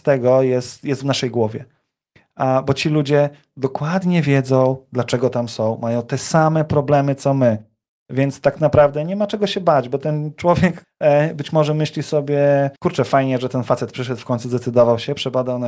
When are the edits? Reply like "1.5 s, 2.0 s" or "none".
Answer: 10.8 s, 12.8 s